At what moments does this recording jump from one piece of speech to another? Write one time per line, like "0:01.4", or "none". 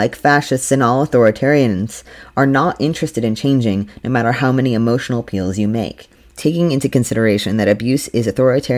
0:06.3